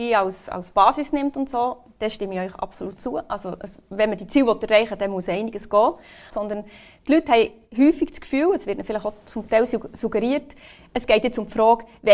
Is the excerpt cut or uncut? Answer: cut